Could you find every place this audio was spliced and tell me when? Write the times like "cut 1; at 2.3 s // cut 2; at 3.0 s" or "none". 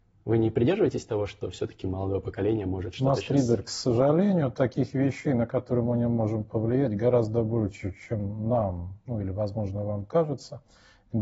none

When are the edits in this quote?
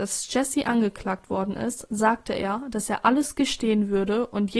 none

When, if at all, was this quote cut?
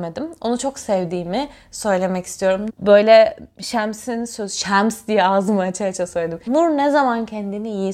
cut 1; at 2.7 s // cut 2; at 6.5 s

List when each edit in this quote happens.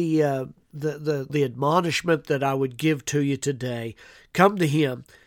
cut 1; at 1.3 s

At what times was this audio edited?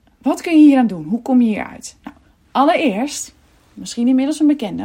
none

